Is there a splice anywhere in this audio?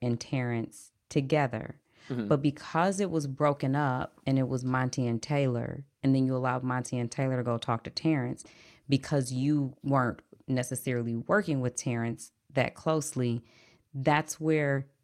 no; 0 cuts

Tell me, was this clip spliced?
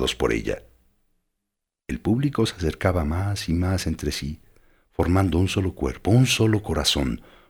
no; 0 cuts

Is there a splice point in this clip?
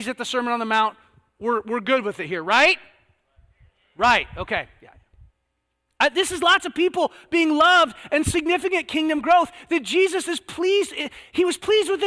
no; 0 cuts

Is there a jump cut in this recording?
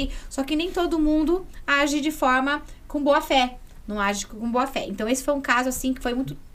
no; 0 cuts

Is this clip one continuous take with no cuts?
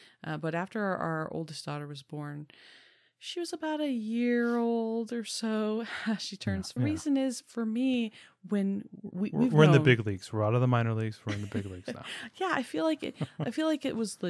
no; 1 cut; at 6.8 s

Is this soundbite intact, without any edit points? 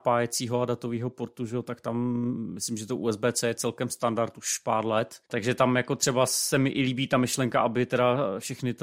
no; 1 cut; at 5.3 s

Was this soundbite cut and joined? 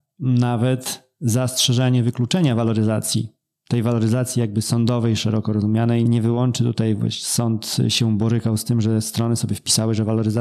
yes; 1 cut; at 6.1 s

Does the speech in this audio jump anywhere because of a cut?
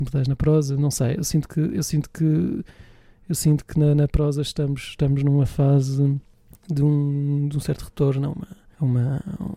no; 0 cuts

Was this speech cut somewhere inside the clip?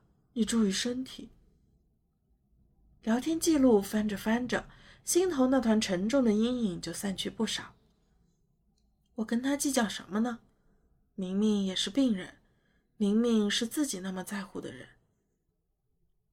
no; 0 cuts

